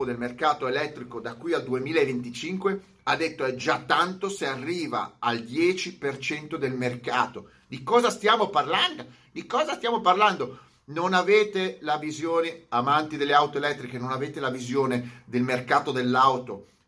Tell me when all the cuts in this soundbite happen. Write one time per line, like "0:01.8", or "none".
none